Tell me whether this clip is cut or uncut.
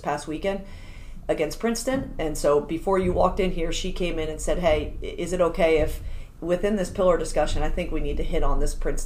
uncut